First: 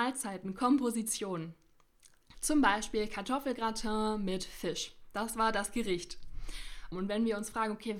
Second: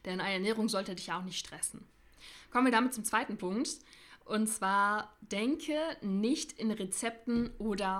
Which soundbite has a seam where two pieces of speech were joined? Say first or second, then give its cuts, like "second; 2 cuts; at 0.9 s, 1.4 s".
first; 2 cuts; at 2.3 s, 6.9 s